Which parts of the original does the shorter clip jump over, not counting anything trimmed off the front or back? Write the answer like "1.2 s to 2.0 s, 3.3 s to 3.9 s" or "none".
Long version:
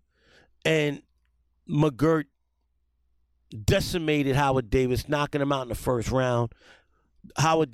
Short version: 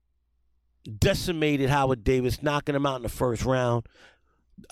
none